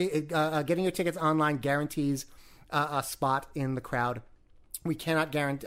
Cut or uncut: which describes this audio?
uncut